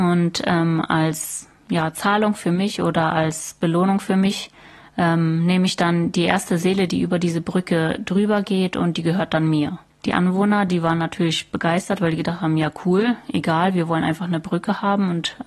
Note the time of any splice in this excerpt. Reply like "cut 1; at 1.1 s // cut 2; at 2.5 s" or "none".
cut 1; at 10.7 s